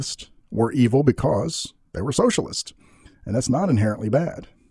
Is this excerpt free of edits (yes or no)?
no